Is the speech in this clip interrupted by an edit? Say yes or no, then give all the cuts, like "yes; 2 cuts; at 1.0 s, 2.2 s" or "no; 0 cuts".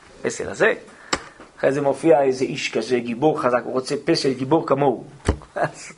no; 0 cuts